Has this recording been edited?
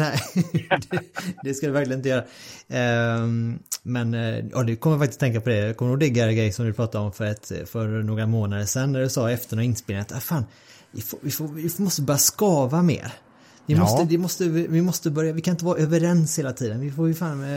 no; 0 cuts

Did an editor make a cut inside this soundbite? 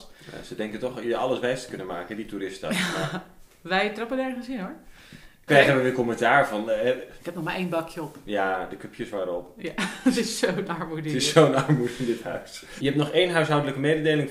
yes; 3 cuts; at 5.5 s, 7.2 s, 12.8 s

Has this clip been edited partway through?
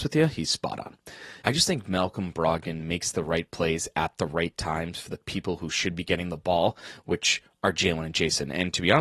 yes; 1 cut; at 1.4 s

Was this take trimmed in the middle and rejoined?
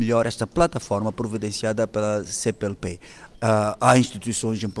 yes; 1 cut; at 3.3 s

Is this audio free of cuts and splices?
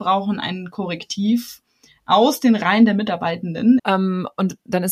no; 1 cut; at 3.8 s

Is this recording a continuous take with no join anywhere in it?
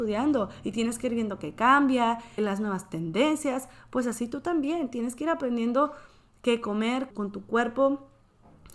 no; 2 cuts; at 2.4 s, 7.1 s

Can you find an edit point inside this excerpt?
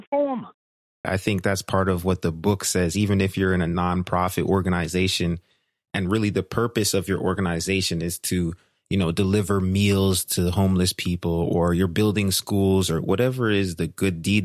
yes; 1 cut; at 1.0 s

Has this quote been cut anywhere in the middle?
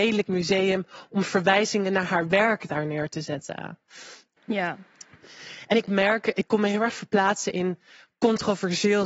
yes; 1 cut; at 4.4 s

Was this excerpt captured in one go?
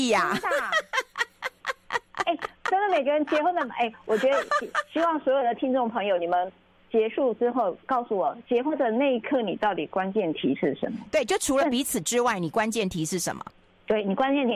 yes; 0 cuts

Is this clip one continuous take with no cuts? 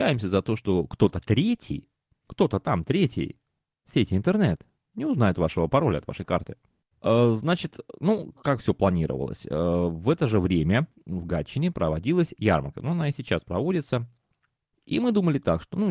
no; 3 cuts; at 6.8 s, 8.3 s, 14.7 s

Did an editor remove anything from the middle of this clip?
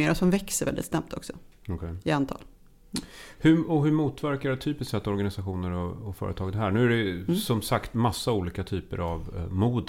no; 0 cuts

